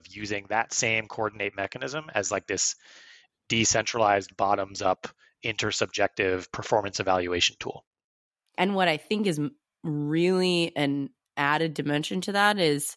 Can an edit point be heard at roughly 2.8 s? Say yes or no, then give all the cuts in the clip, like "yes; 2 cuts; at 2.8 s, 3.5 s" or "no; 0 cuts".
no; 1 cut; at 8.6 s